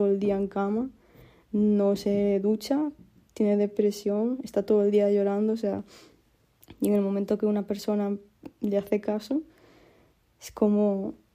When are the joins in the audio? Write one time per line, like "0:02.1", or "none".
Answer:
none